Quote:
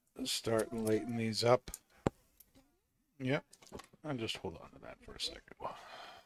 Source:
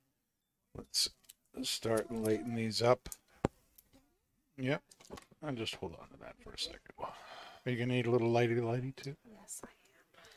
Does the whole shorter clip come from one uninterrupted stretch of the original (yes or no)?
yes